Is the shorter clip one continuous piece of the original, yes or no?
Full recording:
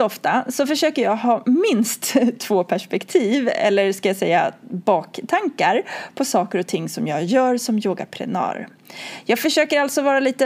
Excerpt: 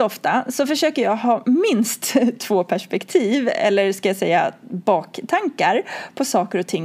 yes